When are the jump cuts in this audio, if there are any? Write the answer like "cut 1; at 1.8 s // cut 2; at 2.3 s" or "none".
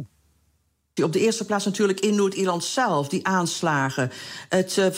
cut 1; at 1.0 s